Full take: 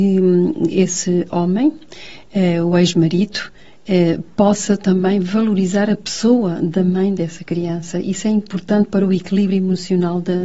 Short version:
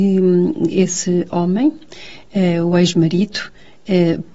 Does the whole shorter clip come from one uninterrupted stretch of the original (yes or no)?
yes